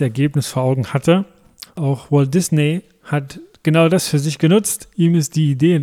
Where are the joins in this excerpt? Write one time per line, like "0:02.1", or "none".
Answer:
0:01.6